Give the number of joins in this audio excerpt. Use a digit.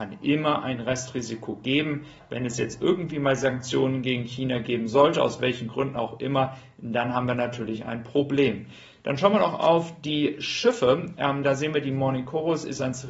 0